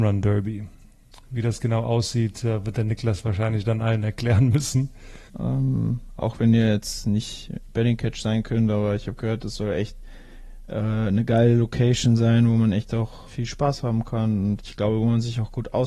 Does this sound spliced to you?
yes; 2 cuts; at 5.3 s, 13.3 s

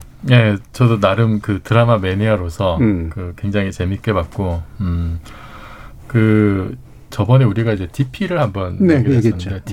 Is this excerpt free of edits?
yes; 0 cuts

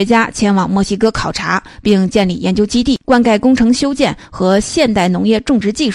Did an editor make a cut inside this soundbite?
yes; 1 cut; at 3.0 s

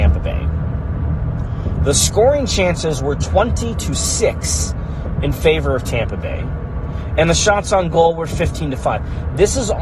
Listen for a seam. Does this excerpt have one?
no; 0 cuts

